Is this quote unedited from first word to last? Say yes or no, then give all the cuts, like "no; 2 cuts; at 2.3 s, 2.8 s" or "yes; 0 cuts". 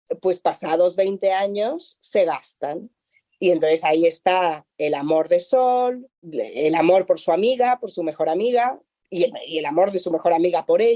no; 1 cut; at 6.2 s